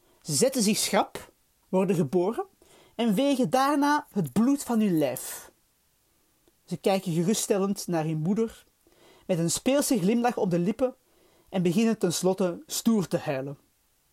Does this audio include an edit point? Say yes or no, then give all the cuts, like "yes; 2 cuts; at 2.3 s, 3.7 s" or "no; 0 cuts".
yes; 1 cut; at 1.6 s